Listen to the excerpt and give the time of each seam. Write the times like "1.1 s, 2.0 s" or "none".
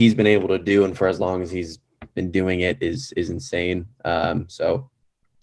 none